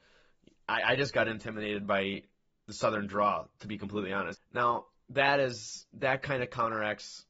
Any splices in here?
yes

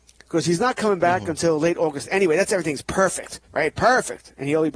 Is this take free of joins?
no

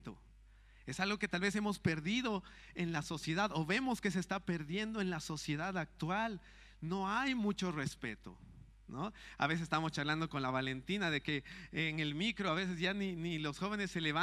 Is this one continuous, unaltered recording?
yes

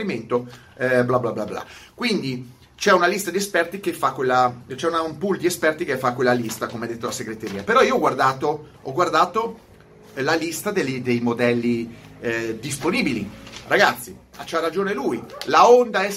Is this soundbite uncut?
yes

